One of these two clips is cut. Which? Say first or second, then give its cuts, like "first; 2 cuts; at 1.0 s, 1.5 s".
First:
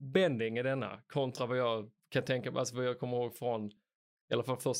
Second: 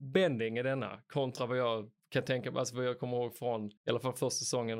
second; 1 cut; at 3.8 s